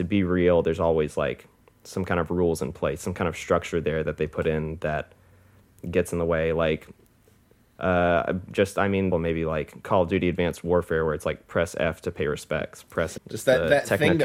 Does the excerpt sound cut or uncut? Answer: cut